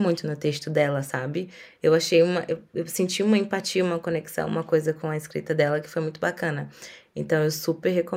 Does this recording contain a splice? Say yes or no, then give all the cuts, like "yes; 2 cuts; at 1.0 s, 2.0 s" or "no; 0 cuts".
no; 0 cuts